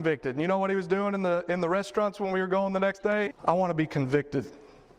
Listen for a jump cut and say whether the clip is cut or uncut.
cut